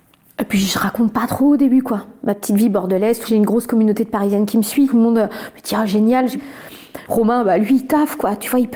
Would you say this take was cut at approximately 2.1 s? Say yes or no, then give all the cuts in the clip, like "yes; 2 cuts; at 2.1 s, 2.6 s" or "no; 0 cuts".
no; 1 cut; at 7.1 s